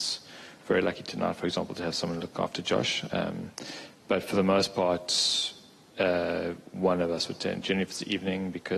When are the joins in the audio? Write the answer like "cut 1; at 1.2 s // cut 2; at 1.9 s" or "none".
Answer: none

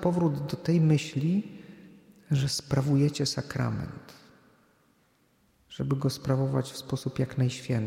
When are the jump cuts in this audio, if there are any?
none

